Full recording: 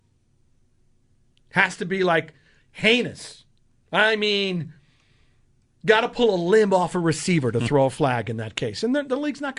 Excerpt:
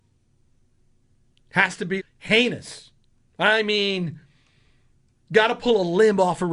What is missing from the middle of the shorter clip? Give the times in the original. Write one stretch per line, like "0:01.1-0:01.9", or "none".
0:02.0-0:02.5